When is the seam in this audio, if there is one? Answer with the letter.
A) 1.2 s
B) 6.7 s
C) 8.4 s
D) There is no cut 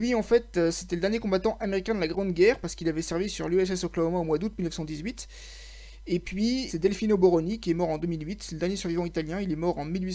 B